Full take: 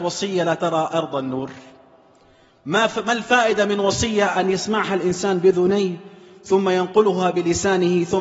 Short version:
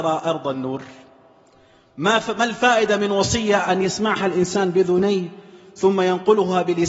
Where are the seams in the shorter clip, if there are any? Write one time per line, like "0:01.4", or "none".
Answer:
none

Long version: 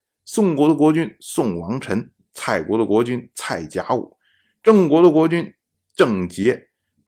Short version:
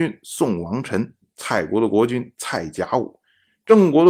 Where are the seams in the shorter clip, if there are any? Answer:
none

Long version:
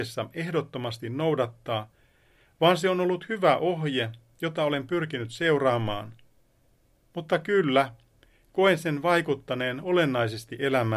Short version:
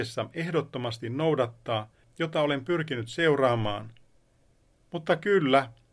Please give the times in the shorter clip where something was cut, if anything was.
0:02.0

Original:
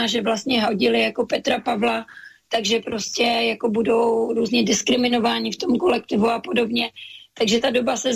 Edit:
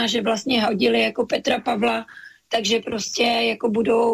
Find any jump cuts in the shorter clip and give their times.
none

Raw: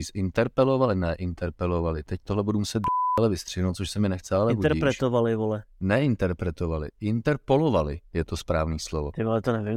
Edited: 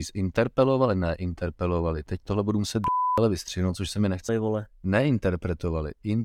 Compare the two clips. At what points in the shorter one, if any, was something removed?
0:04.3

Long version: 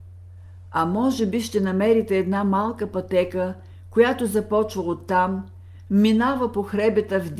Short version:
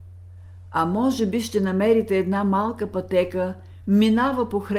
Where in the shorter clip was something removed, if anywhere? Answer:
0:03.8

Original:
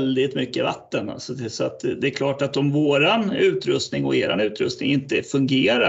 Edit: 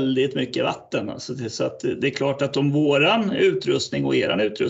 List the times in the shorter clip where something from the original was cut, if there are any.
none

